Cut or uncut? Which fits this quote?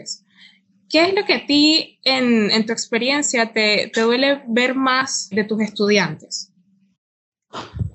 cut